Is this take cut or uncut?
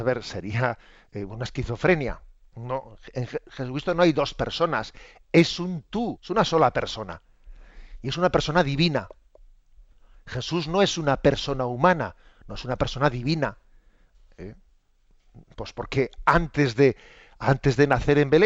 cut